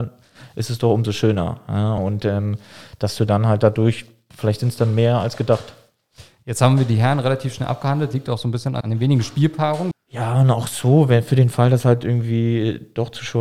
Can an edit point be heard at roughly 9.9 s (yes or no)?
yes